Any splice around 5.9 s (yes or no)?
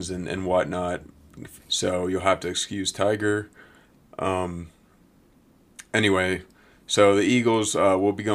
no